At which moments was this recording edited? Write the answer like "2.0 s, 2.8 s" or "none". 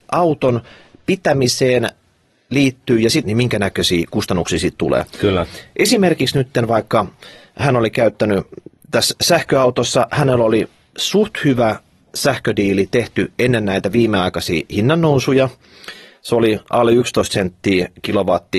3.2 s